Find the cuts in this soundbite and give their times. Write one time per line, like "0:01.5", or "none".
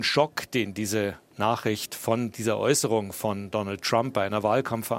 none